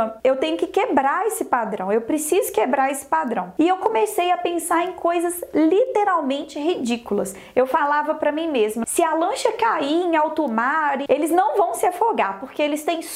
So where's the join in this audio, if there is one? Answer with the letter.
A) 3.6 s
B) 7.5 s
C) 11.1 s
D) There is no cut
C